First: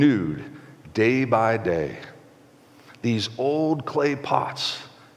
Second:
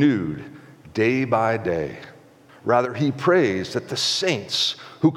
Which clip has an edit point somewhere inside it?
second; 1 cut; at 2.5 s

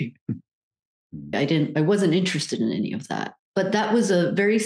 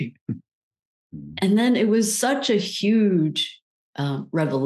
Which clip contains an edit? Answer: first; 2 cuts; at 1.3 s, 3.4 s

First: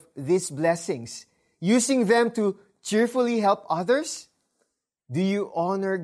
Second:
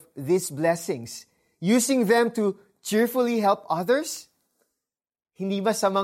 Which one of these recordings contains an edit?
first; 1 cut; at 5.0 s

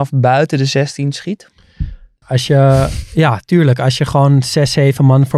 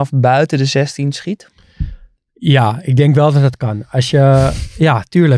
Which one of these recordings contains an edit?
first; 1 cut; at 2.2 s

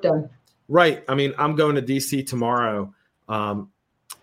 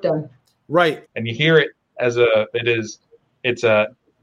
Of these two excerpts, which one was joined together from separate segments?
second; 2 cuts; at 1.0 s, 2.5 s

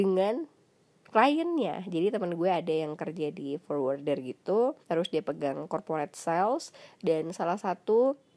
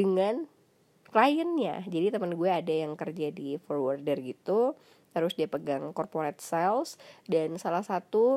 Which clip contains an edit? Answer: first; 1 cut; at 4.8 s

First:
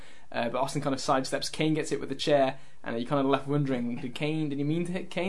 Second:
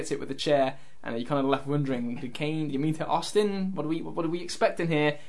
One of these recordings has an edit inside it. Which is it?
second; 1 cut; at 2.7 s

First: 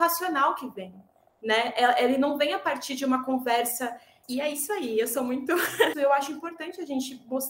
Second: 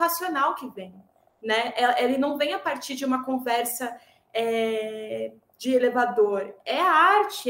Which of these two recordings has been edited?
first; 2 cuts; at 4.2 s, 5.9 s

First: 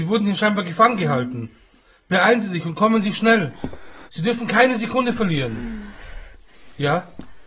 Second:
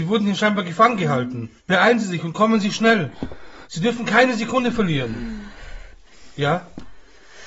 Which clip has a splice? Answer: second; 1 cut; at 1.6 s

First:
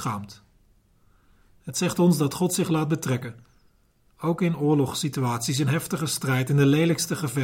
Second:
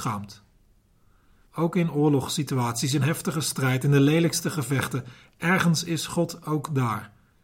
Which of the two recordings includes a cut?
second; 1 cut; at 1.5 s

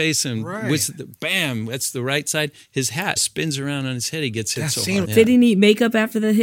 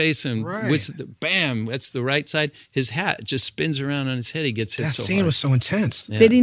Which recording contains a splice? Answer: first; 2 cuts; at 3.2 s, 5.0 s

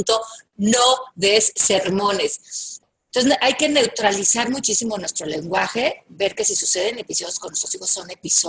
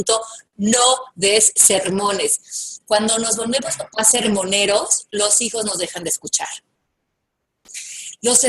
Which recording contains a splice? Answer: first; 1 cut; at 2.8 s

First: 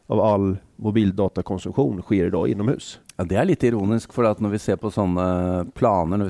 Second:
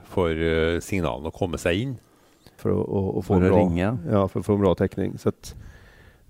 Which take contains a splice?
second; 1 cut; at 2.6 s

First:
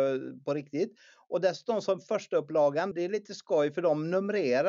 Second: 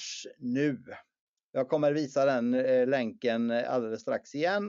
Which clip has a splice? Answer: first; 1 cut; at 2.9 s

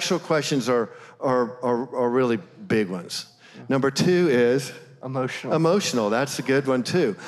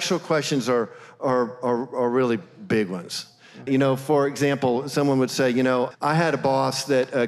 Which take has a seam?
second; 2 cuts; at 3.7 s, 5.9 s

